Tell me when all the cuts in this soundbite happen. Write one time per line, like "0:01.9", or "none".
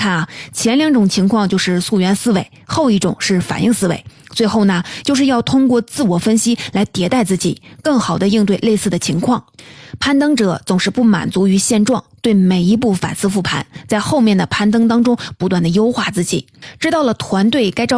0:05.0